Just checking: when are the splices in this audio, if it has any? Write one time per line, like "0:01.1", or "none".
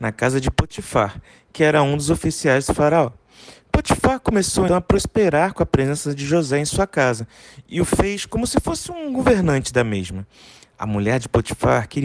0:04.7